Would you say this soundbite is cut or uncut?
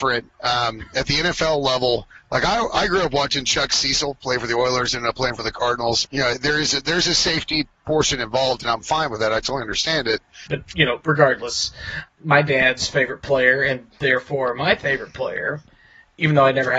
cut